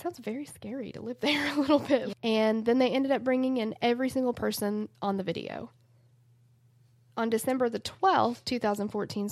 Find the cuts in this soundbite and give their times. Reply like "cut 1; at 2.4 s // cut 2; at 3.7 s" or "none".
cut 1; at 2.1 s